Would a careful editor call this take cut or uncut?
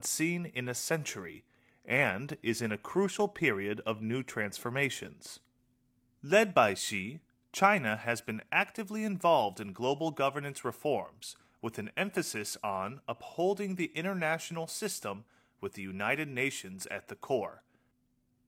uncut